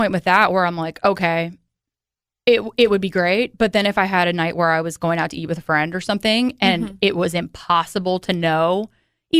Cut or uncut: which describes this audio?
uncut